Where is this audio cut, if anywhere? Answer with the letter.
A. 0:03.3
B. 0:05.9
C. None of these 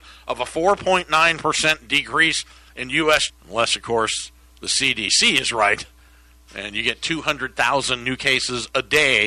A